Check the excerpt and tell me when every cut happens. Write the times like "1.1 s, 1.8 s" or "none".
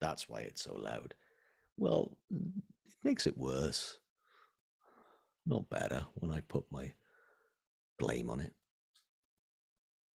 2.2 s